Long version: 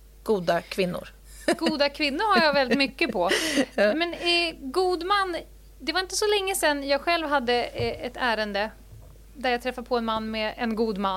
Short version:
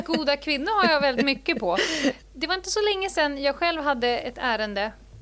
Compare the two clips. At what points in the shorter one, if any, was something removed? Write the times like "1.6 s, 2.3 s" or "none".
2.2 s, 4.2 s